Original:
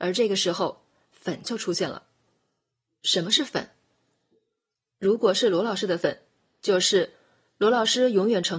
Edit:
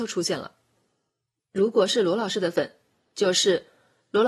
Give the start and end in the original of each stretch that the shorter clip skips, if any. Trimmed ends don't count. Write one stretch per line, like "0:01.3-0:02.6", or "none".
0:02.9-0:04.9